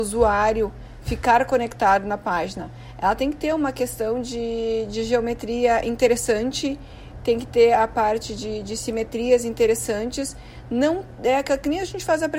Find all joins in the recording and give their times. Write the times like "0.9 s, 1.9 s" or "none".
none